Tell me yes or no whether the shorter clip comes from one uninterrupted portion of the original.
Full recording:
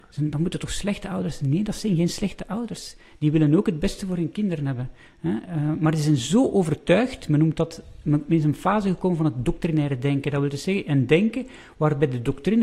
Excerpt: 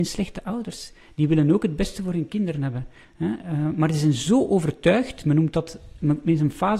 yes